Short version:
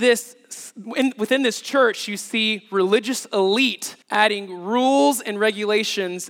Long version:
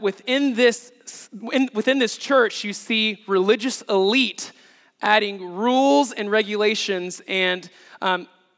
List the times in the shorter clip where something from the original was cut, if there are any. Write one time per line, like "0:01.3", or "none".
0:04.0